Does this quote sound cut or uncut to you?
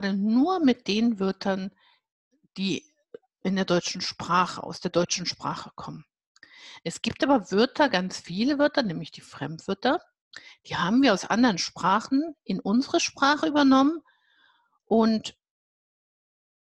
uncut